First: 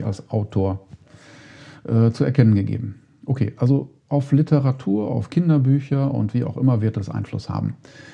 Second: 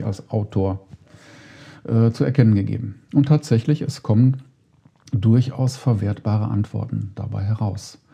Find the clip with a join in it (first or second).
second